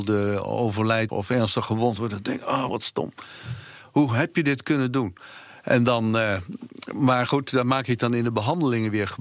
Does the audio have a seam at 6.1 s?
no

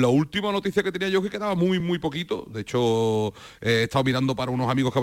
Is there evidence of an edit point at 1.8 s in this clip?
no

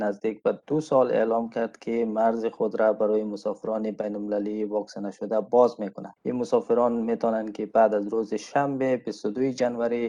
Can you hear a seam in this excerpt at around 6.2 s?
yes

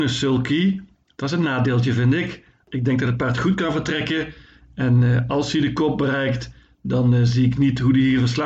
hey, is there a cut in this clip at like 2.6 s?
yes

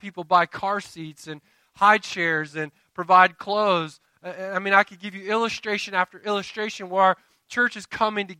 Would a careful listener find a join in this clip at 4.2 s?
no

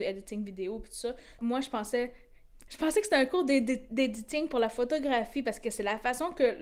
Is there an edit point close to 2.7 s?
yes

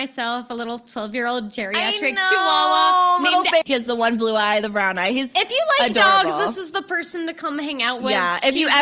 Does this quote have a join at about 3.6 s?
yes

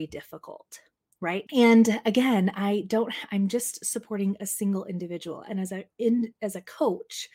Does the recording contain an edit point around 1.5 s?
yes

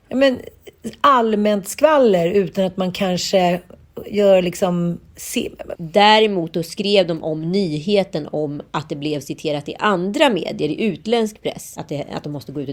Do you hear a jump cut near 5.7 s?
yes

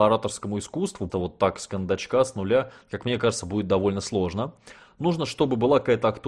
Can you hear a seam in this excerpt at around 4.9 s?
no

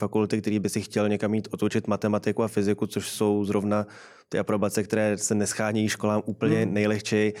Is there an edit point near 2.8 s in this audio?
no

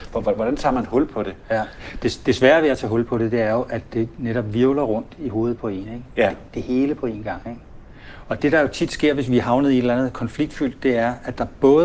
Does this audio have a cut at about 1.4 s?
no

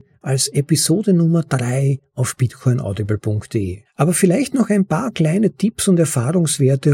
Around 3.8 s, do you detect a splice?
yes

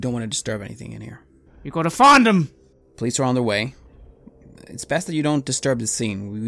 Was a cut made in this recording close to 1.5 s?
yes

